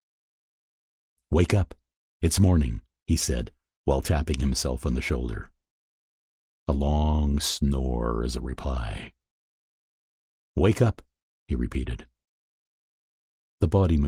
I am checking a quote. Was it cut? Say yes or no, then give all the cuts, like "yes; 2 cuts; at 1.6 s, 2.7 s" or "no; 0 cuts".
no; 0 cuts